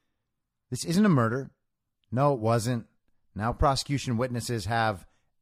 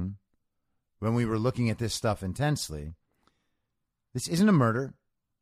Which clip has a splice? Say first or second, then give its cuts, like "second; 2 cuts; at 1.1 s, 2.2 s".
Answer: first; 1 cut; at 2.0 s